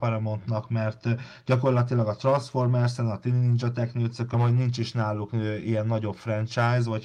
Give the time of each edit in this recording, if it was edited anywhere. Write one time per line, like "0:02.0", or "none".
0:04.3